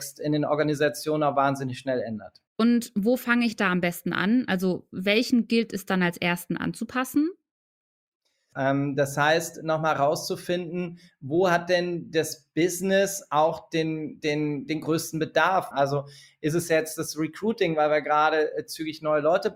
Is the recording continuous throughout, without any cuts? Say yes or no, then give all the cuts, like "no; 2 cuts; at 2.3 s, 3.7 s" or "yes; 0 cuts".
no; 3 cuts; at 2.5 s, 8.5 s, 15.7 s